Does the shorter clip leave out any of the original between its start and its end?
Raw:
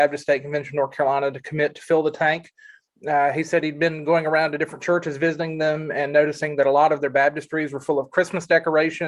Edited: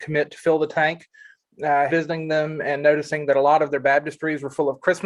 yes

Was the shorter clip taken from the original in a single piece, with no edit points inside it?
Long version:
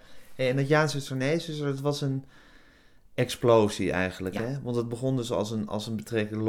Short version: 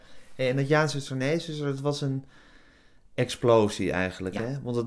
yes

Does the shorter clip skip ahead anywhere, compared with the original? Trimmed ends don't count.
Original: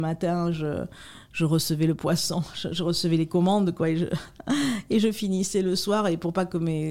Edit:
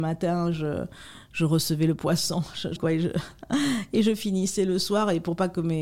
yes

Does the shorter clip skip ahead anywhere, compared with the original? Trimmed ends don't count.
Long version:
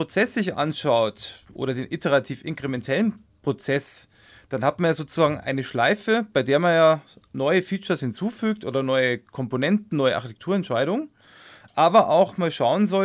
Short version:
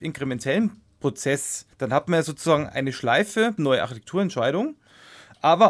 yes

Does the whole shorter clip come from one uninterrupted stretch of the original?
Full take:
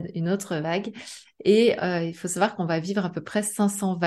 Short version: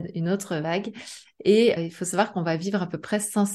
no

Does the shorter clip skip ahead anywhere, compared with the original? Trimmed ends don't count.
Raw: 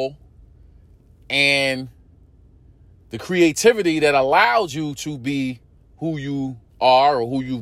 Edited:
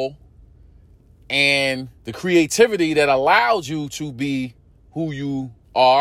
yes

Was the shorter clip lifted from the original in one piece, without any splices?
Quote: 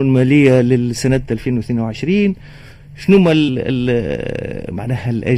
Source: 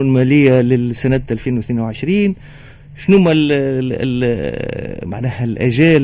no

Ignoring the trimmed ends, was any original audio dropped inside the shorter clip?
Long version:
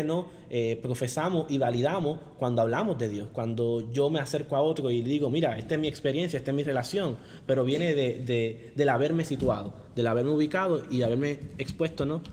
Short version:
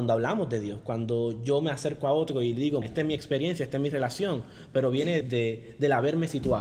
yes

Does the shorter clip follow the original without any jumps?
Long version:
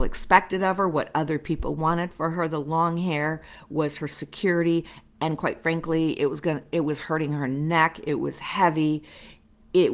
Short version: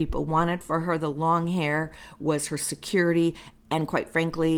yes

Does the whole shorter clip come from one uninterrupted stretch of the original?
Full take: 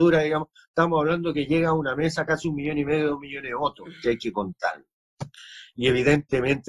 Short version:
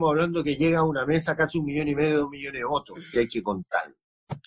yes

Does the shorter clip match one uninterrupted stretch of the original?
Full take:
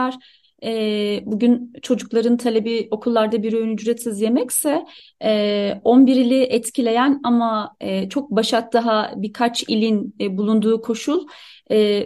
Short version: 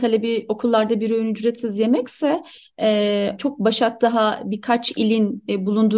no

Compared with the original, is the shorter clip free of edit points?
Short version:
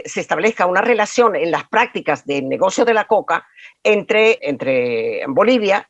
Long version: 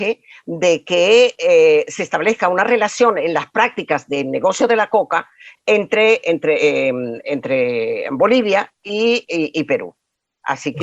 no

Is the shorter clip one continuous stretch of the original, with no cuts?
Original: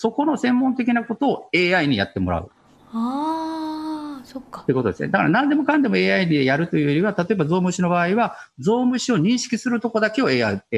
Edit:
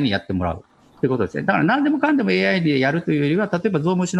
no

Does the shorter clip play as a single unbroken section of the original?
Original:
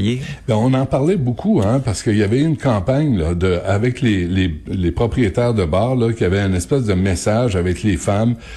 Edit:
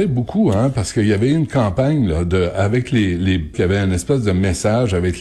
no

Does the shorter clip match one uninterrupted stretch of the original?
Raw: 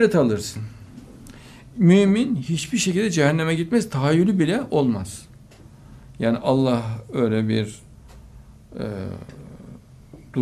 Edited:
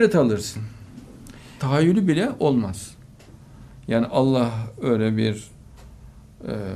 no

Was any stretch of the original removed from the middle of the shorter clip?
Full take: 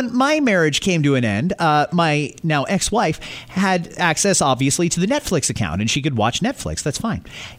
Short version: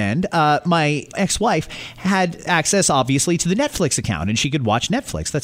yes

